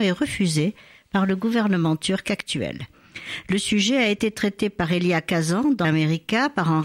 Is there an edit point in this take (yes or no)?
yes